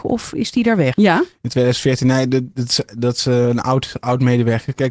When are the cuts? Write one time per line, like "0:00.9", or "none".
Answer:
0:00.9